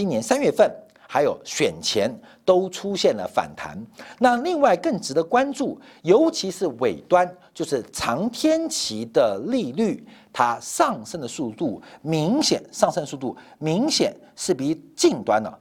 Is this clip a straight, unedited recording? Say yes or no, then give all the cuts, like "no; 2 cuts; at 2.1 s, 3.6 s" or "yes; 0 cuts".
yes; 0 cuts